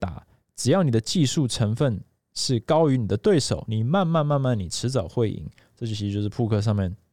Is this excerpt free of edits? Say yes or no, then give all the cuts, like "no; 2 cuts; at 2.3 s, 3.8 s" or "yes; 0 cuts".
yes; 0 cuts